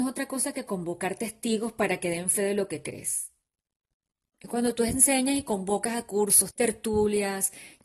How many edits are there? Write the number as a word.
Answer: one